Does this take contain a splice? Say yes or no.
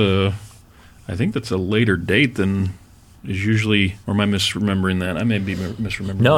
yes